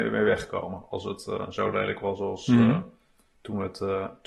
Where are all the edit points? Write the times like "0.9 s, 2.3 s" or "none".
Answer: none